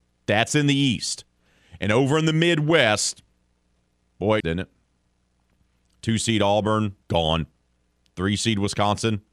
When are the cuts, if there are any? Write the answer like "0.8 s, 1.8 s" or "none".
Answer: 4.4 s, 7.0 s